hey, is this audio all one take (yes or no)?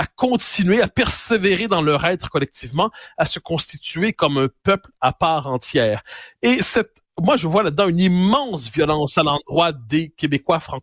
yes